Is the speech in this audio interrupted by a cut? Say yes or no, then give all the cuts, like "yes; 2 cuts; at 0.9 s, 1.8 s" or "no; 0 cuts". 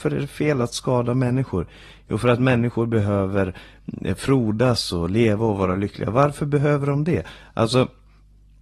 no; 0 cuts